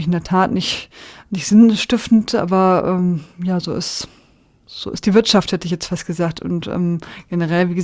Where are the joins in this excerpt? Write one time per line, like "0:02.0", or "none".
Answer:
none